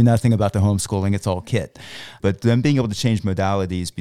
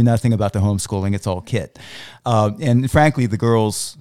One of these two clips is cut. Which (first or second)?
first